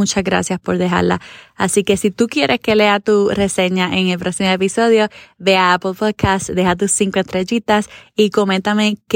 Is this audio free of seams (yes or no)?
yes